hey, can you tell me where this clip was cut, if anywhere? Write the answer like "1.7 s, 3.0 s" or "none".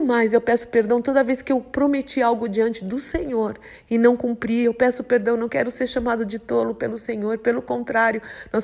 none